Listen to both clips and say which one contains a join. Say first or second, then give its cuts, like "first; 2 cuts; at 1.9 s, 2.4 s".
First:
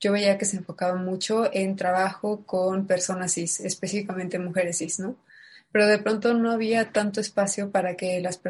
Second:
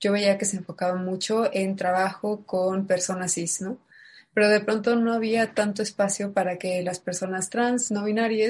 second; 1 cut; at 3.6 s